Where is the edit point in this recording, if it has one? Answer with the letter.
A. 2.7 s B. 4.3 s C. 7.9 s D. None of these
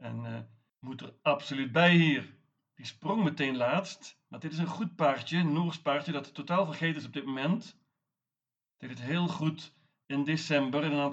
A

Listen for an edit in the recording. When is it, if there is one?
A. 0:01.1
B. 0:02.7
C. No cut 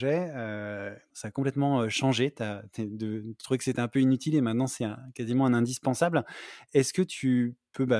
A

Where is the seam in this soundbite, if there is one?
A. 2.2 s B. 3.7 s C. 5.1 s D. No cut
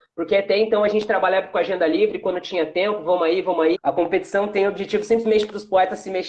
B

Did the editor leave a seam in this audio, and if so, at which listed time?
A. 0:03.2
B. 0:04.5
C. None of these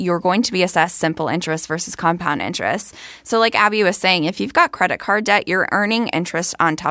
C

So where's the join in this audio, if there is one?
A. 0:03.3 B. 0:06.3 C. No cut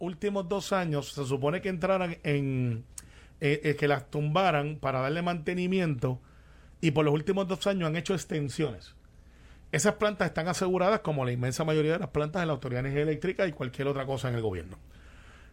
C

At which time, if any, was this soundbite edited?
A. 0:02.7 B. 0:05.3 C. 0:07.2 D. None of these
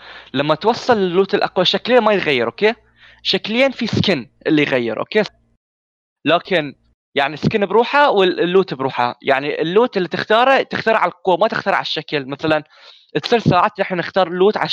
B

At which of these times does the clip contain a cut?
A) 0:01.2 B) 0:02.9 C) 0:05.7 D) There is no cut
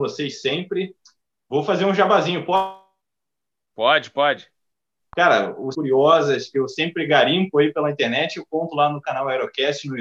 C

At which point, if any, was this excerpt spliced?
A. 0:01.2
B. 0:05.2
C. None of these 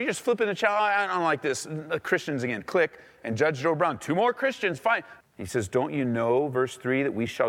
B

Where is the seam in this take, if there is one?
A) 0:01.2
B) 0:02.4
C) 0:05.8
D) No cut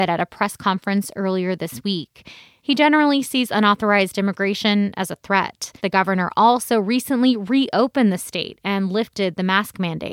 C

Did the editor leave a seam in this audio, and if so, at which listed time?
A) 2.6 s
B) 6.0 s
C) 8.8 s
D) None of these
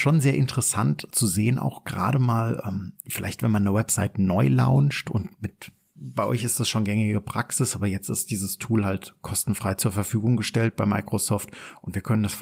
B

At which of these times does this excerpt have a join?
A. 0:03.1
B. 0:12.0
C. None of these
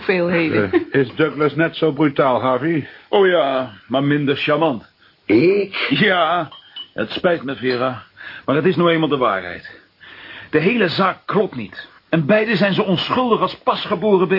B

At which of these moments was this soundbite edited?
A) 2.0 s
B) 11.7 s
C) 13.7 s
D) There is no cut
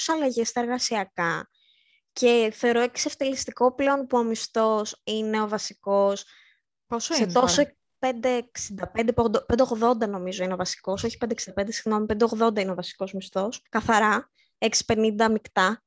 C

